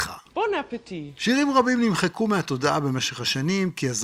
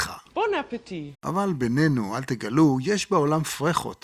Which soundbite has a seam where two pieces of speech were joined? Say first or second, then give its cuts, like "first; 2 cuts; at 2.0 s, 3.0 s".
second; 1 cut; at 1.1 s